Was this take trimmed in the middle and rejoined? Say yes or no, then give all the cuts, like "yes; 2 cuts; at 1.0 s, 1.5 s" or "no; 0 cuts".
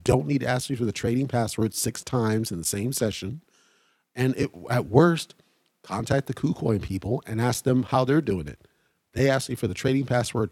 no; 0 cuts